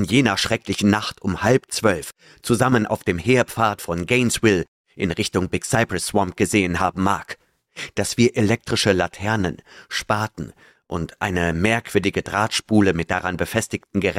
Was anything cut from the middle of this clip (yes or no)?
no